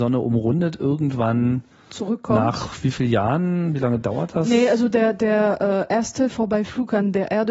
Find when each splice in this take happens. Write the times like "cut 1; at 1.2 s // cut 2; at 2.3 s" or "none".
none

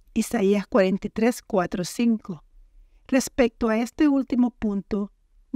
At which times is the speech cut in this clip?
cut 1; at 3.0 s

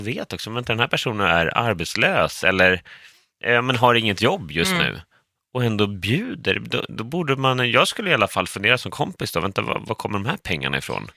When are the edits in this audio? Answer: none

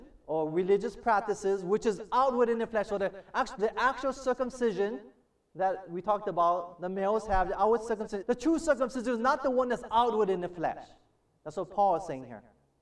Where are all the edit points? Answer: cut 1; at 8.2 s

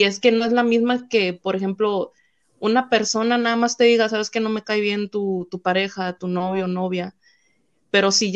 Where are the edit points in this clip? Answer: none

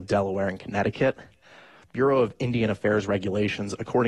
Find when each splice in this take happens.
none

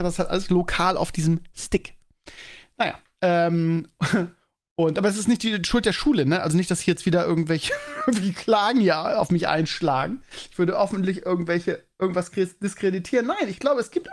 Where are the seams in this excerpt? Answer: none

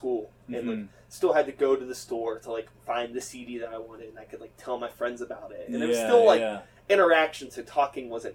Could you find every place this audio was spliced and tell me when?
none

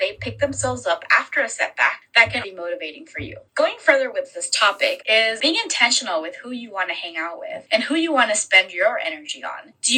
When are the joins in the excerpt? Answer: cut 1; at 2.4 s // cut 2; at 5.0 s

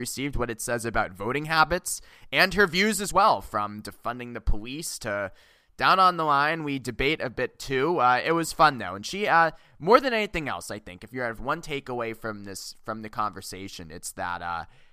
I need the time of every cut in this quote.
none

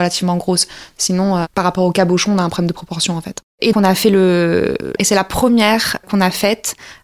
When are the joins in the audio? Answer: cut 1; at 3.7 s // cut 2; at 5.0 s // cut 3; at 6.0 s

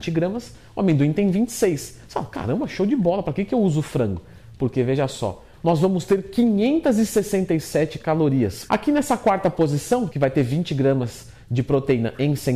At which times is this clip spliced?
cut 1; at 5.6 s // cut 2; at 8.7 s // cut 3; at 10.1 s

